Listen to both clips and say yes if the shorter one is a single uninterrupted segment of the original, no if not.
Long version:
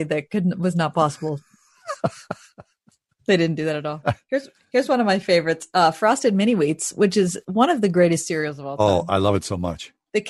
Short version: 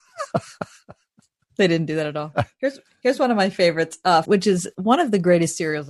no